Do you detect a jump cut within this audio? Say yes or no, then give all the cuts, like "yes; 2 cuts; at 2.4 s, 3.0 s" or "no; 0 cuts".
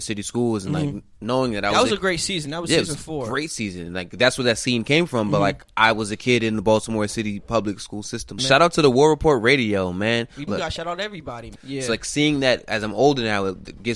yes; 3 cuts; at 8.4 s, 10.5 s, 11.6 s